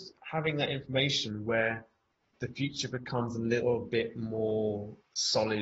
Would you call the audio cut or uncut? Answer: uncut